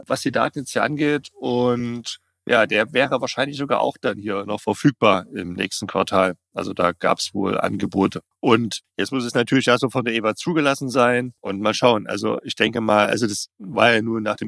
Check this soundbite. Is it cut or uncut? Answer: uncut